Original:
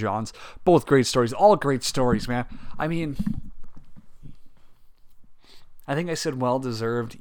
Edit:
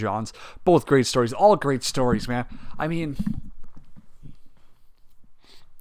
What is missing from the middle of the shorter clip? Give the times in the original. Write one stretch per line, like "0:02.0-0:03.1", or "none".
none